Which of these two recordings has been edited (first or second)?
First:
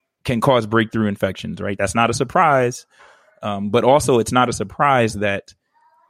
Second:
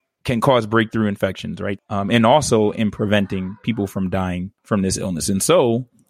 second